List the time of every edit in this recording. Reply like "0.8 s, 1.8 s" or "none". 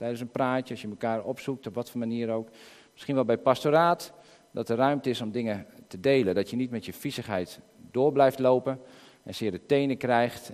none